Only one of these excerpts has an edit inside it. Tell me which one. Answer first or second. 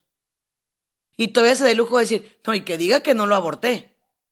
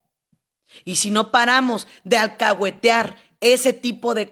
first